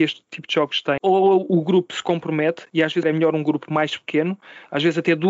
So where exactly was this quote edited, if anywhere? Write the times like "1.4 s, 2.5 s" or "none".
1.0 s, 3.0 s